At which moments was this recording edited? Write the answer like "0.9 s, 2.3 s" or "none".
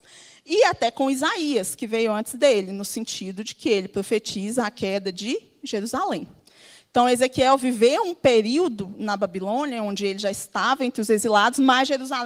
none